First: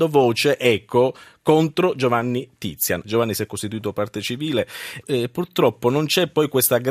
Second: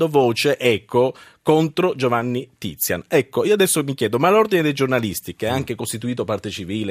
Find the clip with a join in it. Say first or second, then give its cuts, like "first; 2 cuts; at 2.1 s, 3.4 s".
first; 2 cuts; at 3.0 s, 5.0 s